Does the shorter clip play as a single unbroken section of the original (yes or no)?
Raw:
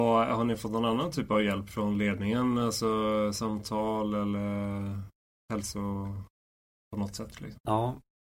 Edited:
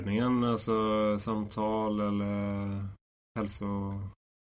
yes